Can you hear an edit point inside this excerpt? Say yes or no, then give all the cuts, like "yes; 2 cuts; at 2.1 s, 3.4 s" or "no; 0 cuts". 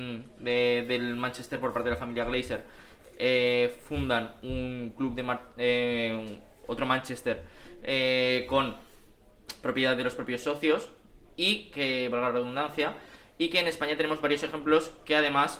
no; 0 cuts